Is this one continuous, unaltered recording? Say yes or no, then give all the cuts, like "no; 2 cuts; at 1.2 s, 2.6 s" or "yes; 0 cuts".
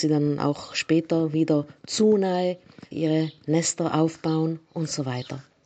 no; 1 cut; at 2.9 s